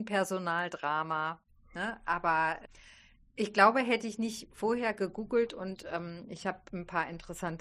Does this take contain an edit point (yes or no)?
no